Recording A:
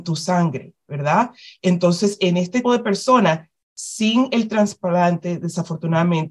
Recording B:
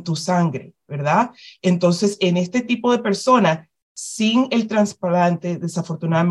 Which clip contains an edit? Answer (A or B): A